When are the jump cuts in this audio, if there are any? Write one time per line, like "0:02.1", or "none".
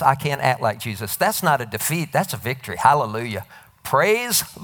none